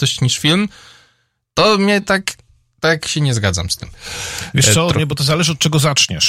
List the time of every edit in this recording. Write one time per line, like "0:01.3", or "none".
none